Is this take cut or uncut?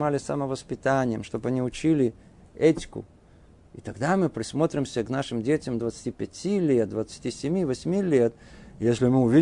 uncut